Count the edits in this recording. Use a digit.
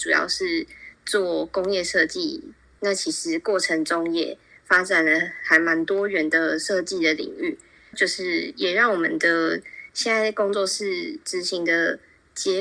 2